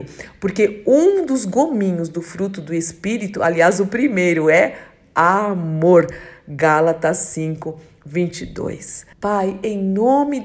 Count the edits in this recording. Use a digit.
1